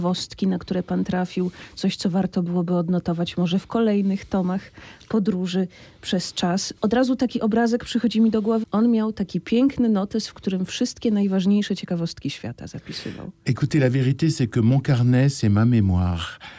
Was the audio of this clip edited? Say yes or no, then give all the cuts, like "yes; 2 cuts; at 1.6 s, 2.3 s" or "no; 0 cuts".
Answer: yes; 1 cut; at 8.6 s